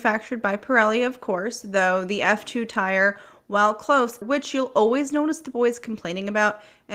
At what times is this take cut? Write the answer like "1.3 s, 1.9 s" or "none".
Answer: 4.2 s